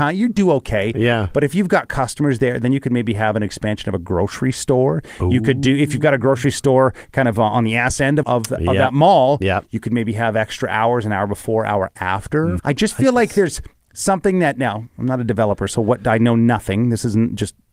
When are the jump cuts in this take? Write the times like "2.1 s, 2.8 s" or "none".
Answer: 8.2 s, 12.6 s